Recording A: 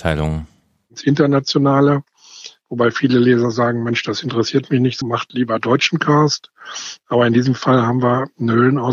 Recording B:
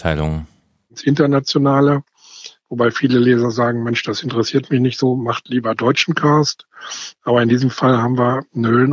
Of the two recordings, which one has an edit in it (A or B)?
A